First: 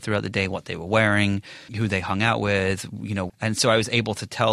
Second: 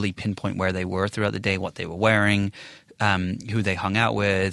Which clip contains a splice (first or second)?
first